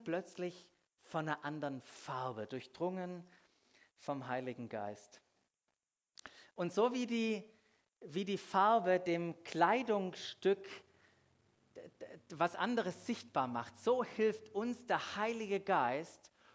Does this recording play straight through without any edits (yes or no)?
yes